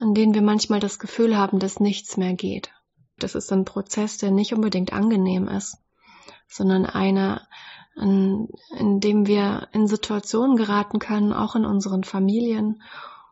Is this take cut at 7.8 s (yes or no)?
no